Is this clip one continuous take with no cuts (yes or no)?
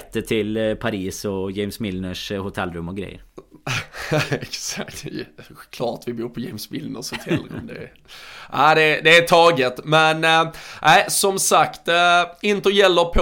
yes